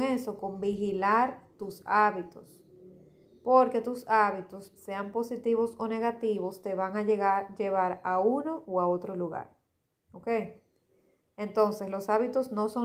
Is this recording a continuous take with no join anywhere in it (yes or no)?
yes